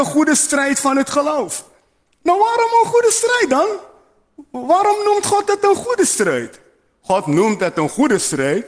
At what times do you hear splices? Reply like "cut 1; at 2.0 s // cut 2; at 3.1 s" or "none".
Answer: none